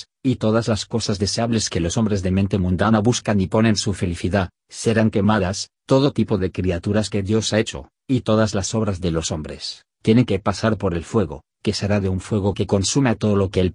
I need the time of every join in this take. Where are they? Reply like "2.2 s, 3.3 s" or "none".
none